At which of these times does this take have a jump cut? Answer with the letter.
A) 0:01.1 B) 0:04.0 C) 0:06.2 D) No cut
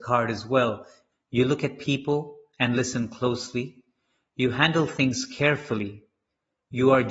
A